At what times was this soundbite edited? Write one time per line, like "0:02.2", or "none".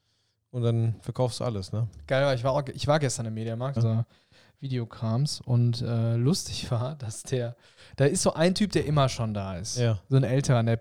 0:03.8